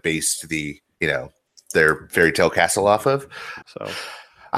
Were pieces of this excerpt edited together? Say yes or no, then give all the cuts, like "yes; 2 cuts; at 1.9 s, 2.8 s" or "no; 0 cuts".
yes; 1 cut; at 3.6 s